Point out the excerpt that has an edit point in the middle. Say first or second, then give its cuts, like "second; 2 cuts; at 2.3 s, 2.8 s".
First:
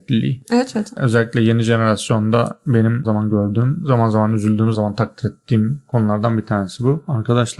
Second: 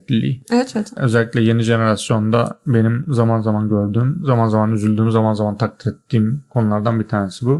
first; 2 cuts; at 3.0 s, 4.7 s